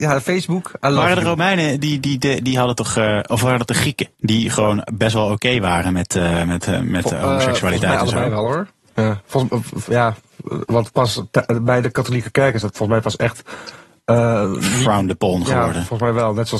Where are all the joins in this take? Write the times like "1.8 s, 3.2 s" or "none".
4.1 s